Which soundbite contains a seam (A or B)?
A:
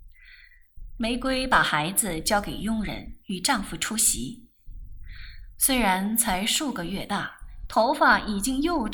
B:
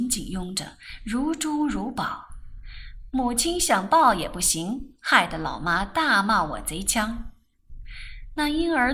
A